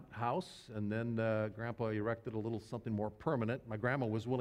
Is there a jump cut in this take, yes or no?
no